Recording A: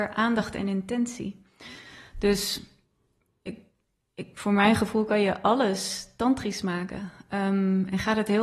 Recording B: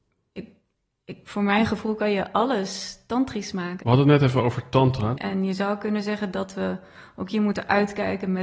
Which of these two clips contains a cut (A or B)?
B